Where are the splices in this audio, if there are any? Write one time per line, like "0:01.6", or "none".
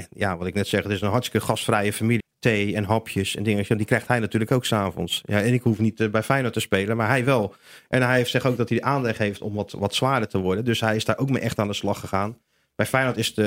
0:02.2